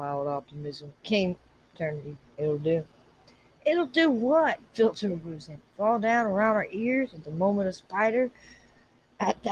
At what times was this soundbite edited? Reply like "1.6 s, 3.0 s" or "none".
2.3 s